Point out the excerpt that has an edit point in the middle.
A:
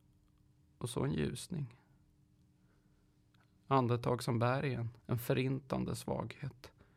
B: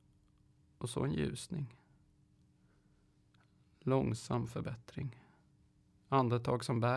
A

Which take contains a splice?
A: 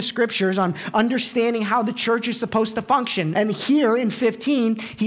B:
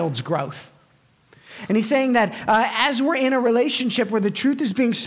A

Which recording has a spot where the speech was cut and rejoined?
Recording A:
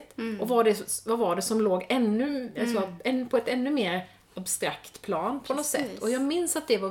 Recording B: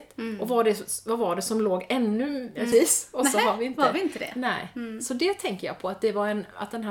B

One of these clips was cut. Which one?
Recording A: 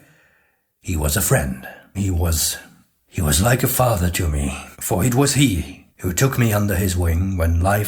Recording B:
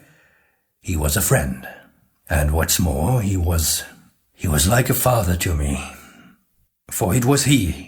A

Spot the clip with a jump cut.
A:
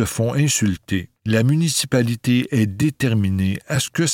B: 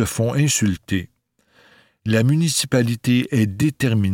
A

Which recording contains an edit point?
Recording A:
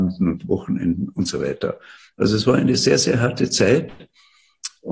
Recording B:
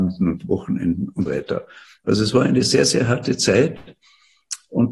B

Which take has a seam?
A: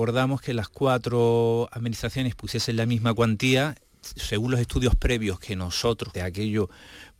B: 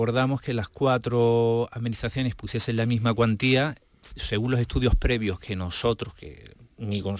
A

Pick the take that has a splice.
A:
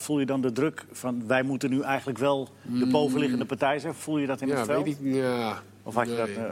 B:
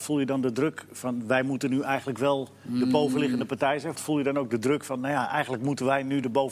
B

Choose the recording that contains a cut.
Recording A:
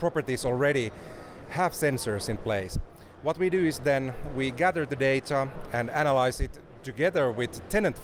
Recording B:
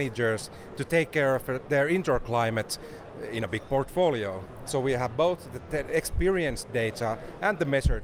B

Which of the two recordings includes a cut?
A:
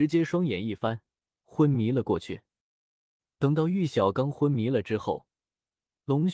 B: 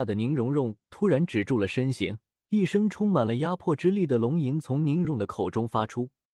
B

